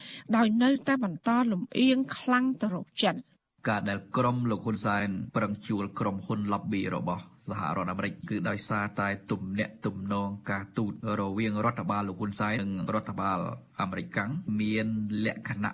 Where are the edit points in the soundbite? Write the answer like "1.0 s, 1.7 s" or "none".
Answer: 12.6 s